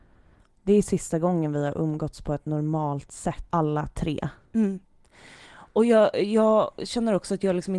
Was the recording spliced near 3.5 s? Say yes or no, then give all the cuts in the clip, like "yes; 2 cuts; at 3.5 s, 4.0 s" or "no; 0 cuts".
yes; 1 cut; at 3.5 s